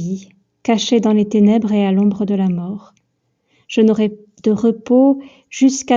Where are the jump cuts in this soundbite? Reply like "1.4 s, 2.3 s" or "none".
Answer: none